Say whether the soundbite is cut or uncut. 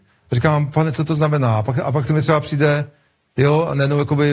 uncut